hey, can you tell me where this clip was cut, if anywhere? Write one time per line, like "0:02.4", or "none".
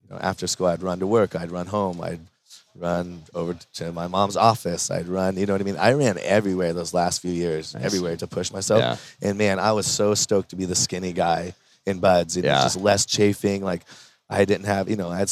0:08.2